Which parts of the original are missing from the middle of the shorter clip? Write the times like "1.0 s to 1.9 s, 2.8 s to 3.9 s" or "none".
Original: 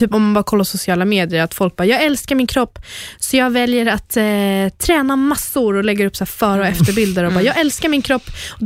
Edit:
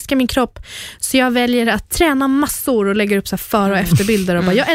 4.1 s to 4.8 s